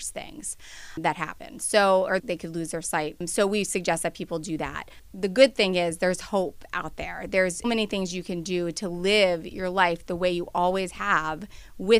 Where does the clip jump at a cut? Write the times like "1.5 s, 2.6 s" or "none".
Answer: 2.2 s, 7.6 s